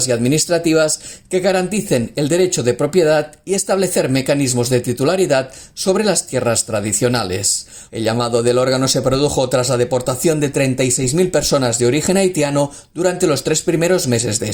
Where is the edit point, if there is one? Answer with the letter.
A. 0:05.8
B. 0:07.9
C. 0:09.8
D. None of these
B